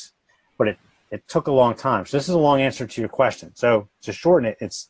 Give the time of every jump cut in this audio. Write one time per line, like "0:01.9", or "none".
none